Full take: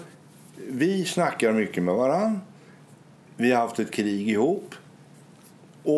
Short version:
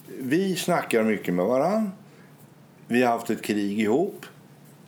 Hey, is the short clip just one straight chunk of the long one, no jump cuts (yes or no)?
yes